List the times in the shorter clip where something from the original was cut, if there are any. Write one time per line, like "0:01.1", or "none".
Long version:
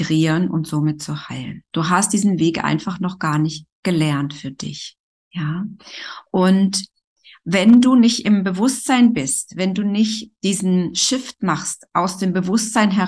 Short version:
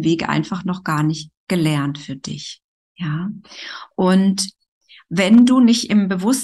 none